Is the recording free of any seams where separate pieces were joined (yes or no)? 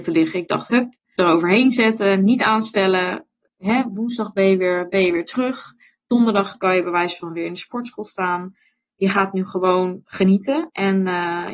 no